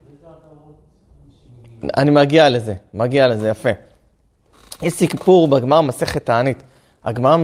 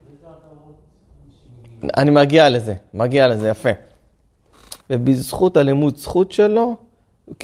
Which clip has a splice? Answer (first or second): second